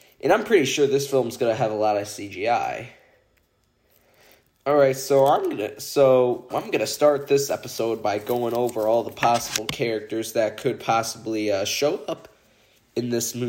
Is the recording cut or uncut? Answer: cut